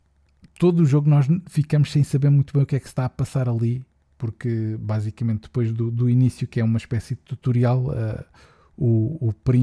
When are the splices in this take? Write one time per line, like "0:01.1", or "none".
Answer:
none